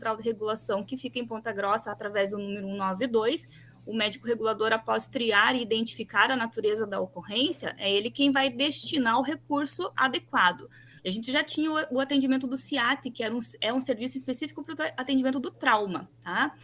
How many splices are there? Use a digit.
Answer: 1